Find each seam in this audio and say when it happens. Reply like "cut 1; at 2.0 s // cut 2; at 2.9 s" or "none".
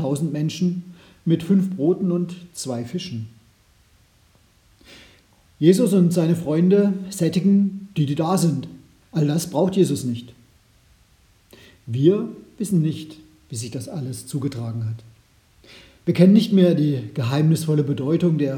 cut 1; at 9.0 s